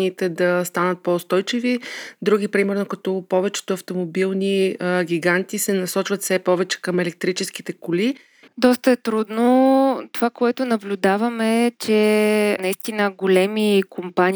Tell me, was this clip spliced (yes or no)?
yes